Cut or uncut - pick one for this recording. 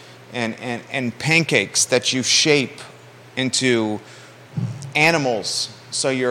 uncut